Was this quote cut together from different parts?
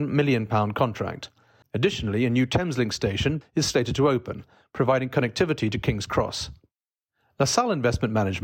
yes; 2 cuts; at 1.6 s, 3.4 s

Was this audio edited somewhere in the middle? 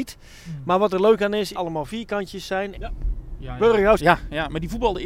yes; 3 cuts; at 1.5 s, 2.7 s, 4.0 s

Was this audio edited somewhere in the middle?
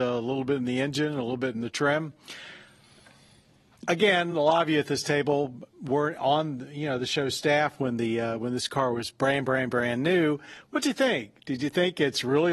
no; 0 cuts

